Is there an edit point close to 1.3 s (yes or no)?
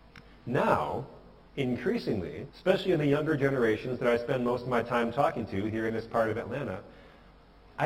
no